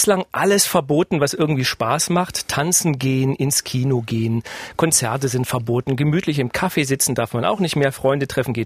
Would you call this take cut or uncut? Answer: uncut